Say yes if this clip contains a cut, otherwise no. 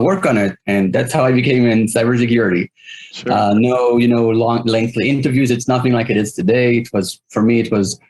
no